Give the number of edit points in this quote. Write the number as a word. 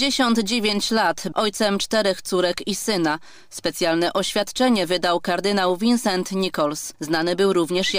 two